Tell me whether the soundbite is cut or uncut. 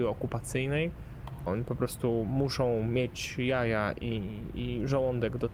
cut